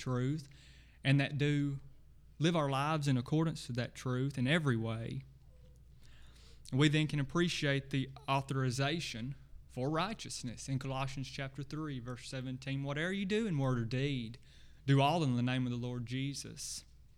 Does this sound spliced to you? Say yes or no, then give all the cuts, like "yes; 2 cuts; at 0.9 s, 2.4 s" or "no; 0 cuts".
no; 0 cuts